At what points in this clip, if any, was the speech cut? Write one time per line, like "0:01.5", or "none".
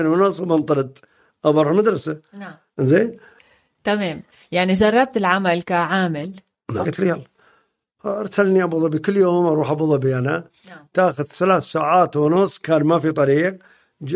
0:06.8